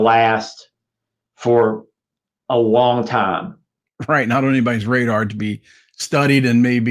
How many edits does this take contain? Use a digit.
0